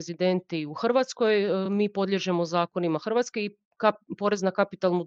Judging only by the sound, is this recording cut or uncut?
uncut